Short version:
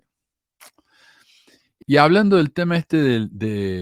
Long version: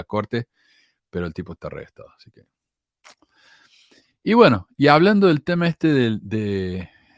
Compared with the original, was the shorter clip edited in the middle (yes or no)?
yes